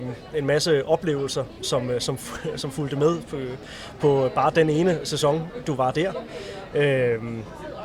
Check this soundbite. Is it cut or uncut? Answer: uncut